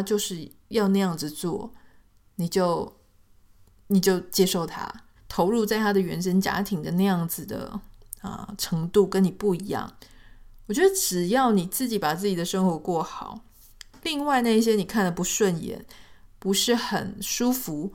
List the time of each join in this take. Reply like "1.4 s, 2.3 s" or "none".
5.2 s

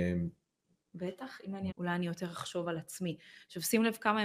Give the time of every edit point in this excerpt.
1.7 s

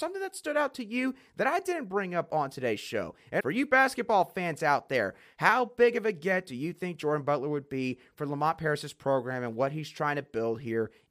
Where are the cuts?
3.4 s

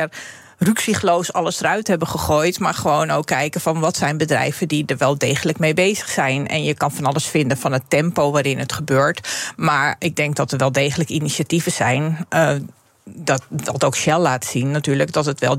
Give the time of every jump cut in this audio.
10.0 s

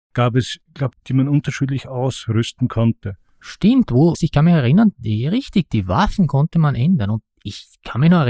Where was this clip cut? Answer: 0.9 s, 4.1 s

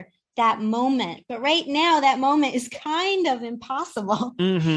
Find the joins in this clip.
none

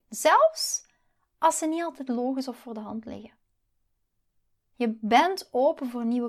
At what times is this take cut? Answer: 4.7 s

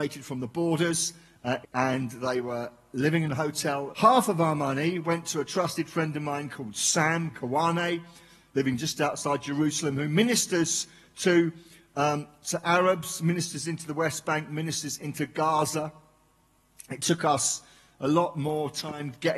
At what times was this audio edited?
1.6 s, 3.9 s

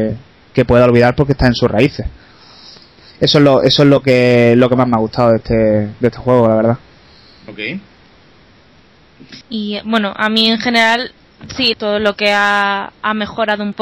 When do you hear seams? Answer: 9.4 s, 11.7 s

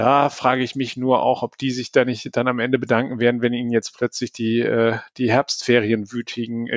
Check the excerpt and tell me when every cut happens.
none

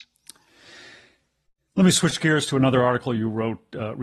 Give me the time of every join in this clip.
none

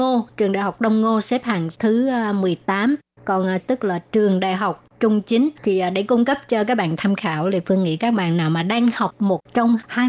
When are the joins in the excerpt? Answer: 3.6 s, 5.6 s

